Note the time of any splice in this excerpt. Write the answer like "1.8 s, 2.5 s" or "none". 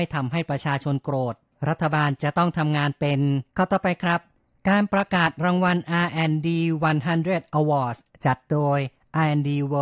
3.5 s